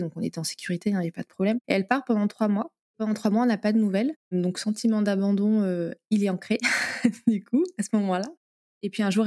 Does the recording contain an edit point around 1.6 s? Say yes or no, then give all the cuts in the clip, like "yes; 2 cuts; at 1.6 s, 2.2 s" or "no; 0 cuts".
yes; 1 cut; at 1.6 s